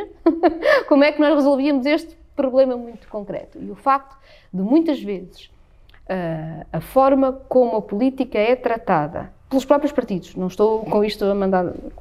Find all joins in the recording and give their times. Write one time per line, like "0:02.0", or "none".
0:09.4